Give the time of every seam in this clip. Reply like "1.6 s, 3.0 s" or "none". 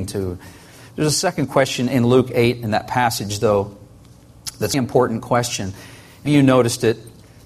4.7 s, 6.3 s